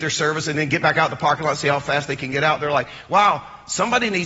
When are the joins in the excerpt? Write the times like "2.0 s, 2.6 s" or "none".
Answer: none